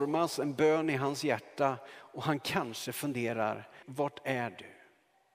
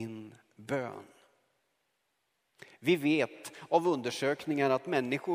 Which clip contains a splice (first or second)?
first